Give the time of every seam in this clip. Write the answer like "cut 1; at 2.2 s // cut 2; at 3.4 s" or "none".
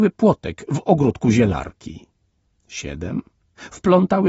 cut 1; at 2.5 s